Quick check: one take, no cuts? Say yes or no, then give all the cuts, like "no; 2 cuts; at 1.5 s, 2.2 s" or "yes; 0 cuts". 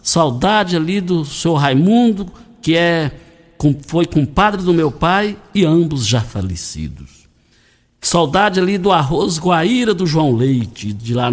yes; 0 cuts